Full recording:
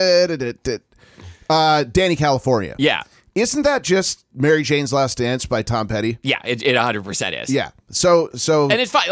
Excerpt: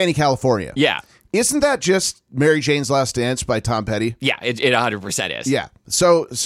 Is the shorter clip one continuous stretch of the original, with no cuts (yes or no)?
yes